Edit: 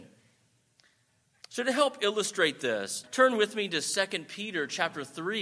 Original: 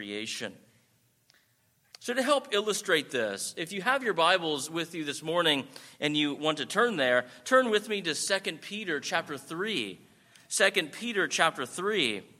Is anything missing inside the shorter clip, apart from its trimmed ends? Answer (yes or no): yes